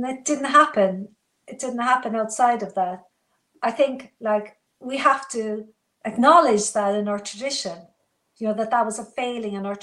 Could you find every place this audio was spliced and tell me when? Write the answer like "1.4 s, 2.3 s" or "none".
none